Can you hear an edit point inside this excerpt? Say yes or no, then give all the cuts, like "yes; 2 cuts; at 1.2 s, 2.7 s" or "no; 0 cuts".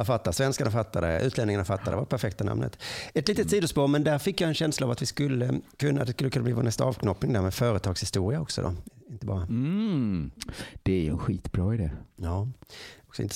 no; 0 cuts